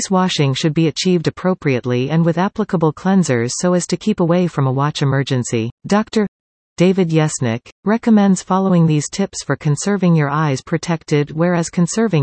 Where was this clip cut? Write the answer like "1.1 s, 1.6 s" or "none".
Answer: 5.8 s, 7.8 s